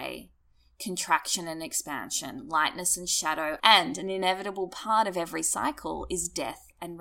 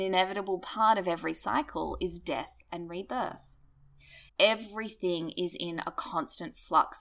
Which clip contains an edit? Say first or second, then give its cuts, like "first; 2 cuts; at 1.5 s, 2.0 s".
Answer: second; 1 cut; at 4.3 s